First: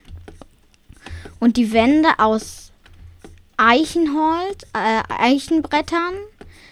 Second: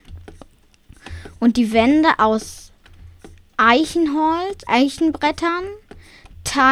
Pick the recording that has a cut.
second; 1 cut; at 4.7 s

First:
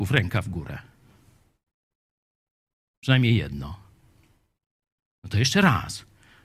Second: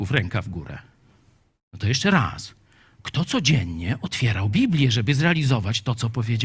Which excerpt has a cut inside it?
second; 1 cut; at 1.6 s

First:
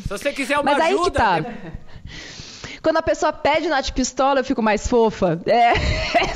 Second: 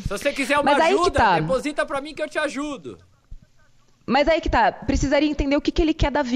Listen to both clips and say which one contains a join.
first; 1 cut; at 1.4 s

